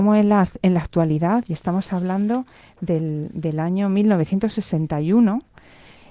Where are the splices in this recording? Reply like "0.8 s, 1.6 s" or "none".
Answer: none